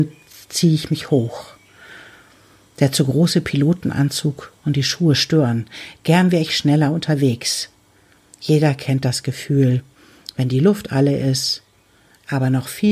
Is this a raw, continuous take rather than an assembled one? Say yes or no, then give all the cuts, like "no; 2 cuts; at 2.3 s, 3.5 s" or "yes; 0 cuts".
yes; 0 cuts